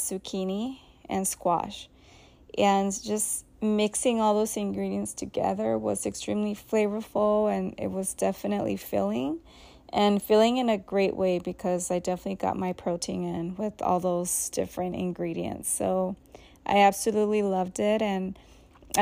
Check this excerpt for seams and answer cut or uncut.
uncut